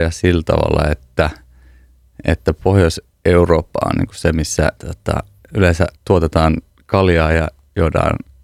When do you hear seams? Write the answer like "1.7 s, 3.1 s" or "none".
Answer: 4.8 s, 6.0 s